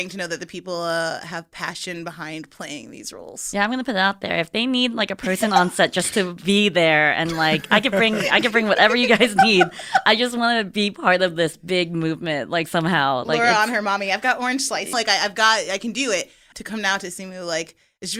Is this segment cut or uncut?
cut